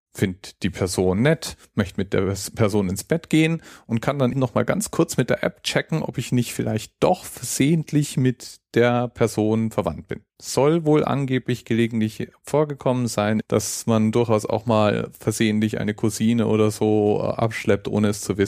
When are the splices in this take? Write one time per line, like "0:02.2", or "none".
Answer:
0:04.3
0:10.3
0:13.4